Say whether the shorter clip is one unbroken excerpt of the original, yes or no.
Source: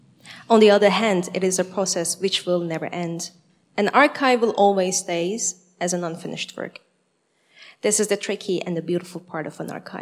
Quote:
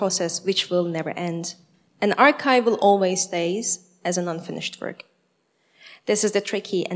yes